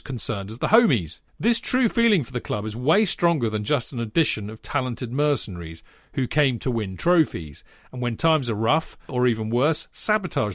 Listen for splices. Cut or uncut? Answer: cut